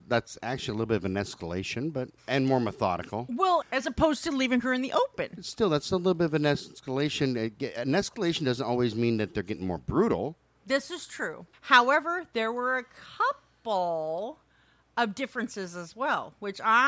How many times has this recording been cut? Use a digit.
3